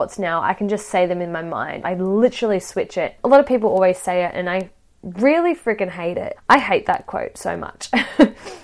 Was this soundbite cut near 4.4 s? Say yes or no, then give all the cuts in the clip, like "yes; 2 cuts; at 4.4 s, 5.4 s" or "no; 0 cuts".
no; 3 cuts; at 1.8 s, 3.2 s, 6.3 s